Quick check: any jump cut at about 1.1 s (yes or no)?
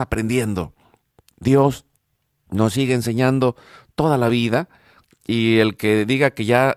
no